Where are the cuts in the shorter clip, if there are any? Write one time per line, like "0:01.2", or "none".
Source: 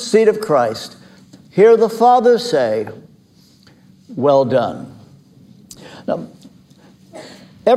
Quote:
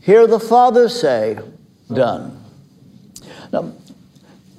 0:01.9